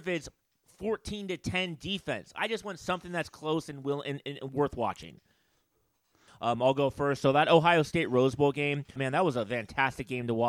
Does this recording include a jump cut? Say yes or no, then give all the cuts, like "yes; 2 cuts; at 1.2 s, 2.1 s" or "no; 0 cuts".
yes; 2 cuts; at 6.3 s, 9.0 s